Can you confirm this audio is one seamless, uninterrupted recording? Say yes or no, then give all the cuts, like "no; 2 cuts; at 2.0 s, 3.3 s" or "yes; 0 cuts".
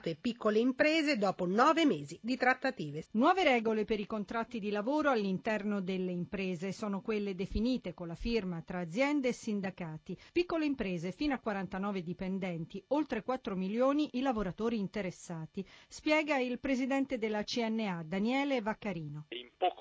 no; 1 cut; at 3.0 s